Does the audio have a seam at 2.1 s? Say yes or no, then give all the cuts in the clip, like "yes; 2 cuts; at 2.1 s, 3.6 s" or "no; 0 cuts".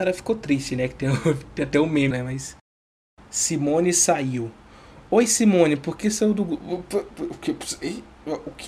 yes; 1 cut; at 2.1 s